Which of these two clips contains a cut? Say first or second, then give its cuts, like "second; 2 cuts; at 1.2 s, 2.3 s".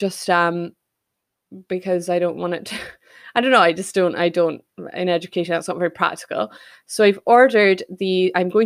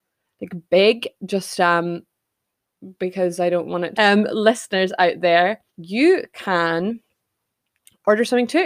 second; 2 cuts; at 3.9 s, 5.7 s